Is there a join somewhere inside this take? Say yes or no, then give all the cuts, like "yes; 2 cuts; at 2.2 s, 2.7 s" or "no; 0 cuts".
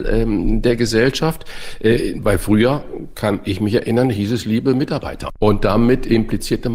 no; 0 cuts